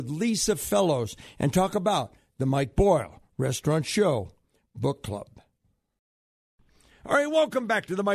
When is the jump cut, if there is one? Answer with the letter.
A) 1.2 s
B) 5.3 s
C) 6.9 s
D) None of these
D